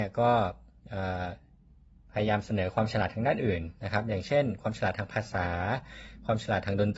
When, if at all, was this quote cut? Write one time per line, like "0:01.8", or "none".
none